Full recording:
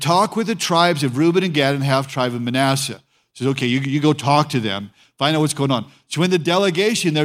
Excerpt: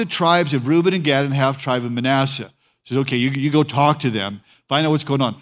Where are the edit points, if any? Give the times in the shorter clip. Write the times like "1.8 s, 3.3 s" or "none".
none